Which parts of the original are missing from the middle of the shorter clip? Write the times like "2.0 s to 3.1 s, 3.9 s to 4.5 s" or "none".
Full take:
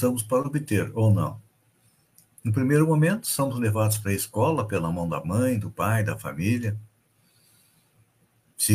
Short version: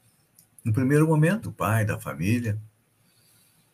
3.2 s to 5.6 s

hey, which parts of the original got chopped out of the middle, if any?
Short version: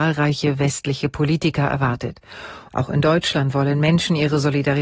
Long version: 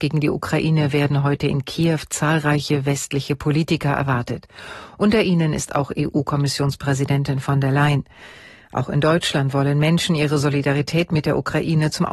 4.9 s to 8.7 s

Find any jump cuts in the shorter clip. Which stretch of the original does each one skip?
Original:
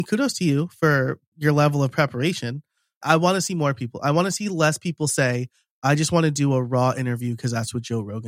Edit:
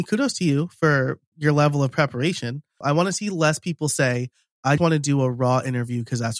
2.8 s to 4.0 s, 6.0 s to 6.1 s

